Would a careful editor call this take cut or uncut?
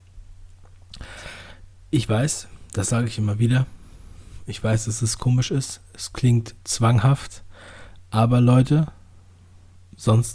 uncut